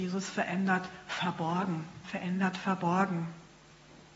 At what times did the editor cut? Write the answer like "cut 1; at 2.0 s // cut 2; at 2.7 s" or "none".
cut 1; at 2.0 s